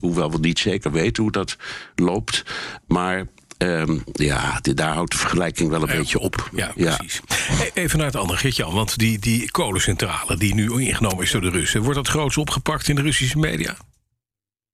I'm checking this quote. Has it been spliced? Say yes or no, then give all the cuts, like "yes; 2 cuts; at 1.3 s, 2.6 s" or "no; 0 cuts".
no; 0 cuts